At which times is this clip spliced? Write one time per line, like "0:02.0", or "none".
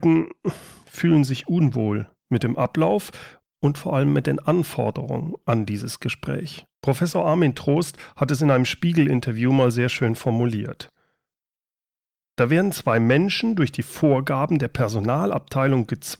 0:06.7